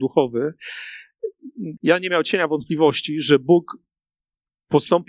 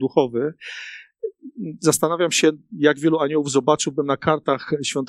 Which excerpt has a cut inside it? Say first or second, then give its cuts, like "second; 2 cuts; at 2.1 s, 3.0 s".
first; 1 cut; at 1.8 s